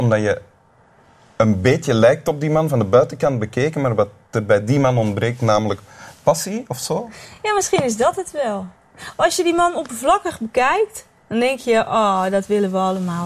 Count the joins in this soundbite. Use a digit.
0